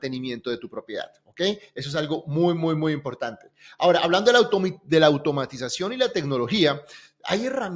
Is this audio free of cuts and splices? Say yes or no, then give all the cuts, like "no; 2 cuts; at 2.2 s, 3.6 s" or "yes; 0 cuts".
yes; 0 cuts